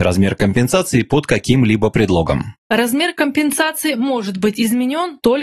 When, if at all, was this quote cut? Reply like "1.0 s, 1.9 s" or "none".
none